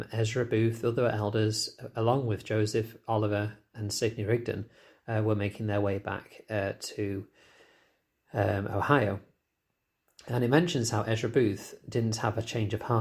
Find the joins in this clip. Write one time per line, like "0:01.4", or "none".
none